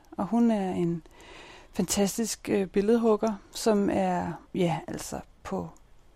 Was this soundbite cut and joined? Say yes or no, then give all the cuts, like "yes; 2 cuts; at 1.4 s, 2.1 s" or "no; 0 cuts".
yes; 1 cut; at 4.4 s